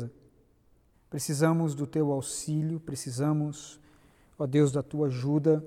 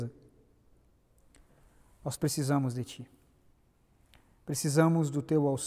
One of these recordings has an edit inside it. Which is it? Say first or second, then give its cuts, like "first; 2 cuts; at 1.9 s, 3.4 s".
first; 1 cut; at 0.9 s